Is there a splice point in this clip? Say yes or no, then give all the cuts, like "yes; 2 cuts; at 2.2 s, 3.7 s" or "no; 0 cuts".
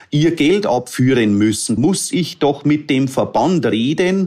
yes; 1 cut; at 1.8 s